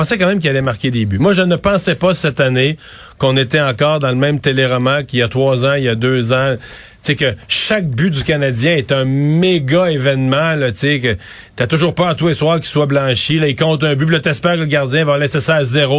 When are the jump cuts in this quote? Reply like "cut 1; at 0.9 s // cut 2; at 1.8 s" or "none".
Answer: none